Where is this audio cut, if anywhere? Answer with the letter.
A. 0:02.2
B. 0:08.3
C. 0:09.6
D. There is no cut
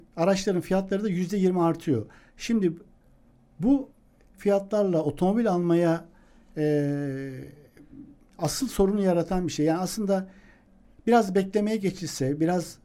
B